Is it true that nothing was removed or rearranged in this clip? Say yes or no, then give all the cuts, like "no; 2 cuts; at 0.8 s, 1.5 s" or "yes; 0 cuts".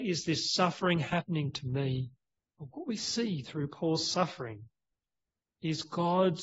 no; 1 cut; at 2.5 s